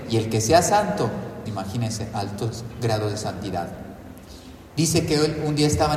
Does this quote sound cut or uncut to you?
cut